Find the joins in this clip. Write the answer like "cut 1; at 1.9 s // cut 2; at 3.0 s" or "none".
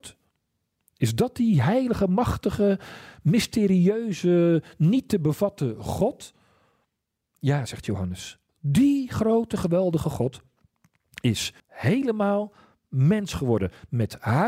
cut 1; at 8.5 s // cut 2; at 11.6 s